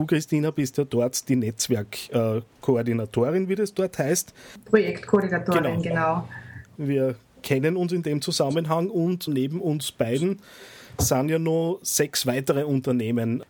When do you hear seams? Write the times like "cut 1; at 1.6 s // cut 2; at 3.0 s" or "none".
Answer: cut 1; at 6.8 s // cut 2; at 9.3 s